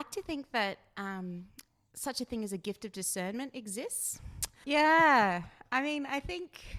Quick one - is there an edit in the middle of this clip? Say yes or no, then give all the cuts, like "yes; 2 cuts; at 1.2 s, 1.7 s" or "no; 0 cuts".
yes; 1 cut; at 4.6 s